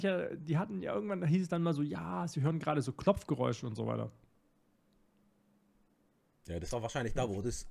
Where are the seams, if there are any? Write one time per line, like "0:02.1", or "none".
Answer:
none